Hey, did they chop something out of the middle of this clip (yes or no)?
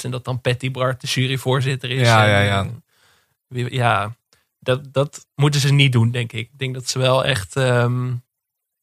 no